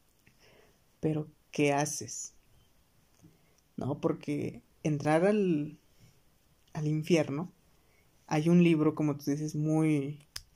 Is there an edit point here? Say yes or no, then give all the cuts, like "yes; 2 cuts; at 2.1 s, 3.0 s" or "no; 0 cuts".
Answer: no; 0 cuts